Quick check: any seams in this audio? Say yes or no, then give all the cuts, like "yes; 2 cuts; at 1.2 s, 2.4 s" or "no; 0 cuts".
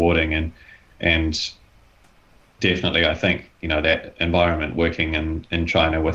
no; 0 cuts